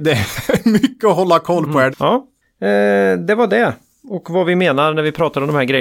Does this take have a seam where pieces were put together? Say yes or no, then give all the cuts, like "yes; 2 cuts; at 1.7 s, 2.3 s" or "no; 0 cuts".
yes; 1 cut; at 1.9 s